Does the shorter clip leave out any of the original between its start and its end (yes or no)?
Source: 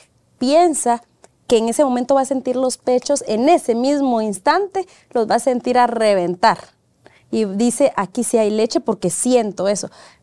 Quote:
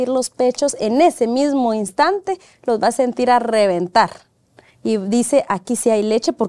no